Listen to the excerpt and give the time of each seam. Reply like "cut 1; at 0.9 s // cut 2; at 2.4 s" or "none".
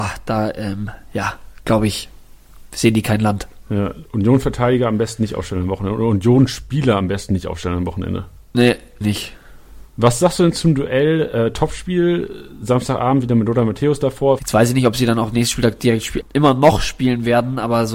cut 1; at 9.0 s // cut 2; at 14.4 s // cut 3; at 16.2 s